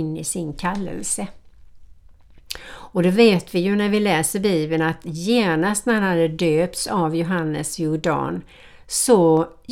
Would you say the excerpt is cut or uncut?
uncut